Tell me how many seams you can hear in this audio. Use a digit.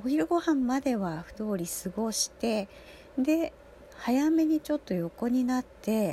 1